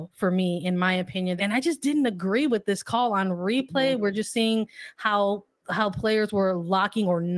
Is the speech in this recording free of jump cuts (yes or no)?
no